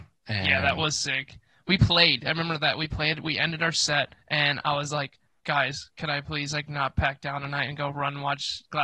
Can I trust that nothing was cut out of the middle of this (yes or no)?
no